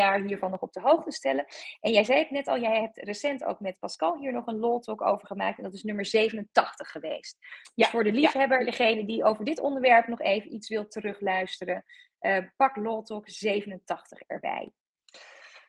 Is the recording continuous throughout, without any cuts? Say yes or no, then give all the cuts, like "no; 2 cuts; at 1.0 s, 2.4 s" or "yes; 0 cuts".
yes; 0 cuts